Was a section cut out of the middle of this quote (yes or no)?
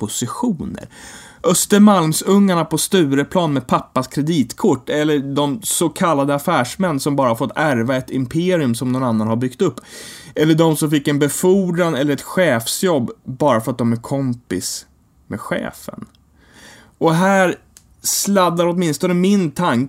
no